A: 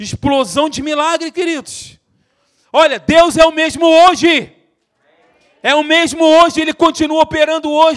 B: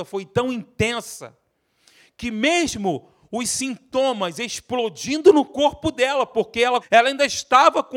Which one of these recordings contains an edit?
B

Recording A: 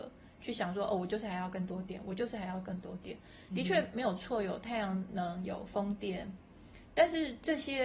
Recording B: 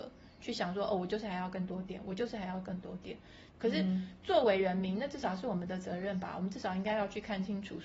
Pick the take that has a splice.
B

